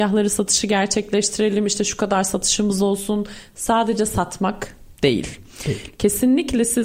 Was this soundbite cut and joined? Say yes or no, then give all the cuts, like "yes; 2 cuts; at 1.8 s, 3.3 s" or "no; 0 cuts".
no; 0 cuts